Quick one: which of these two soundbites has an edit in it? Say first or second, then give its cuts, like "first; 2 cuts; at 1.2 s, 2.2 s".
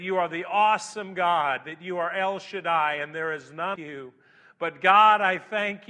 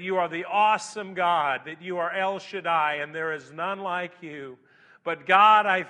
first; 1 cut; at 3.8 s